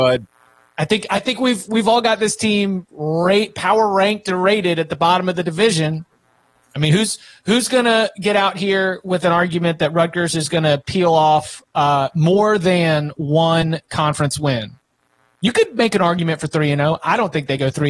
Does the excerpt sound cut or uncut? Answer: uncut